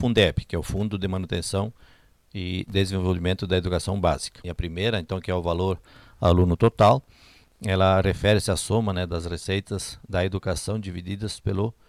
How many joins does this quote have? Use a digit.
1